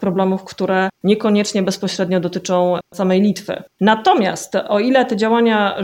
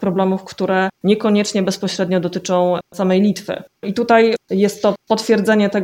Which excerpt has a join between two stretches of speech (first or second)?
second